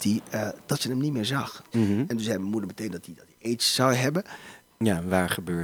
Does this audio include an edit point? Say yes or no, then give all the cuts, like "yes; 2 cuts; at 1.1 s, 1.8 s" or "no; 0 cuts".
yes; 2 cuts; at 1.7 s, 4.7 s